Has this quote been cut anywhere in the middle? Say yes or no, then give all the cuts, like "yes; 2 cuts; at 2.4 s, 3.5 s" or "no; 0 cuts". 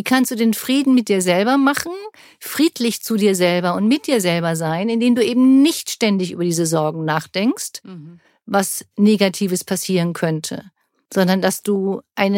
no; 0 cuts